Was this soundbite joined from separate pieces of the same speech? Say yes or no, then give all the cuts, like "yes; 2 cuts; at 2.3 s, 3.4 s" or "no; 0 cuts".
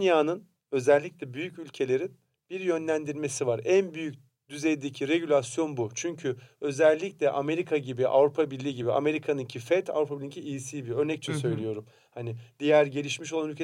no; 0 cuts